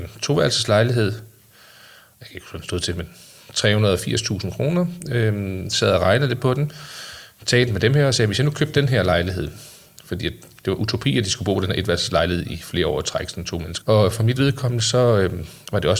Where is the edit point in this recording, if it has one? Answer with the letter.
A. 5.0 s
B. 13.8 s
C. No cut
B